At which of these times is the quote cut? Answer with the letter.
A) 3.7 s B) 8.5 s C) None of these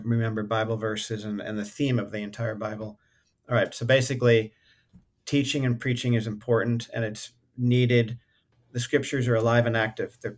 B